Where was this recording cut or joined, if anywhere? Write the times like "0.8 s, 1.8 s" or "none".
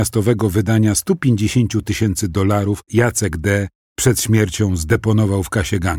2.9 s

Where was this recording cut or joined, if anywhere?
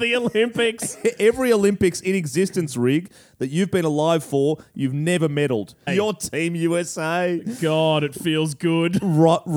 5.9 s

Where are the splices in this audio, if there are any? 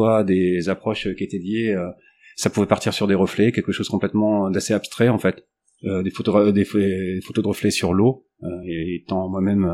none

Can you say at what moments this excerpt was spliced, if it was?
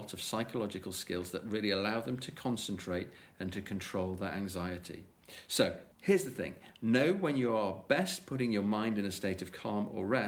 5.9 s

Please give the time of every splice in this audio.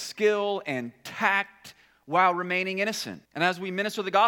3.3 s

